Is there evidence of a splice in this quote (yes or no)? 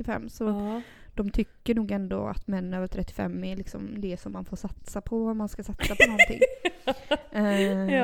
no